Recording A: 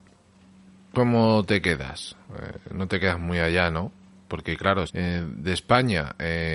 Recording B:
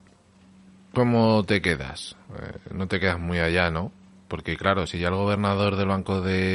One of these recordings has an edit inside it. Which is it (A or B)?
A